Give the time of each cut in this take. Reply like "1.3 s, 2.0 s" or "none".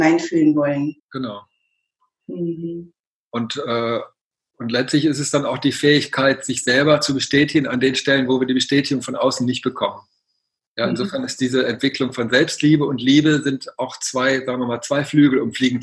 1.0 s